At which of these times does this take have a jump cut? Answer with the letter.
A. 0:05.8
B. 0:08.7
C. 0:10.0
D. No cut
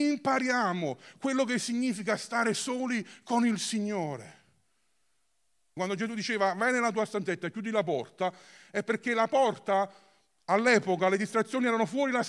A